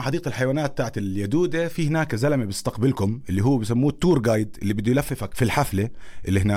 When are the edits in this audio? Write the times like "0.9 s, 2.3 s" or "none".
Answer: 5.3 s